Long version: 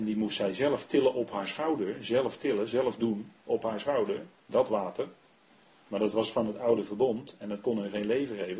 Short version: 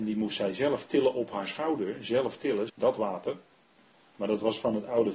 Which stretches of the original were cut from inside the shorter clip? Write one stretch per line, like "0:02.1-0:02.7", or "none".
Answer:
0:02.7-0:04.4